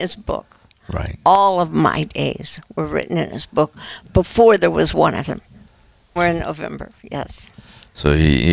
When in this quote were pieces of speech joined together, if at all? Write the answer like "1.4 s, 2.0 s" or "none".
6.2 s